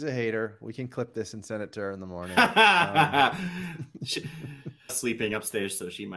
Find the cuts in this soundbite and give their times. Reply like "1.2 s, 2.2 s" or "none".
4.9 s